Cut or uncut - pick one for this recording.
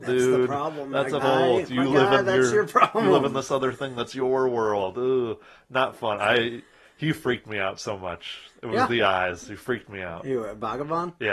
cut